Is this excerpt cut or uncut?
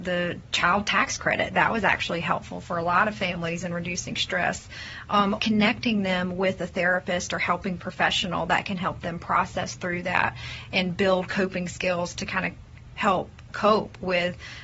cut